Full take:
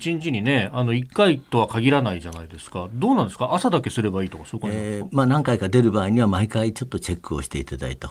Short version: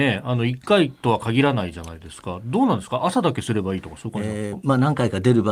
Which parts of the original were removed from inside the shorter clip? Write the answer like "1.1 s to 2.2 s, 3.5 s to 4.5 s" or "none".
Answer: none